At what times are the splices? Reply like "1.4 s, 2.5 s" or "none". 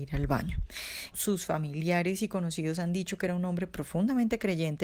1.1 s